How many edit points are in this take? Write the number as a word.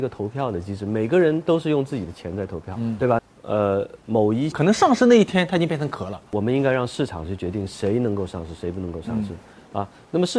two